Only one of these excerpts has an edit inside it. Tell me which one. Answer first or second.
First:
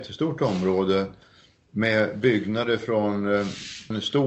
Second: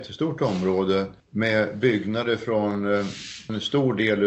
second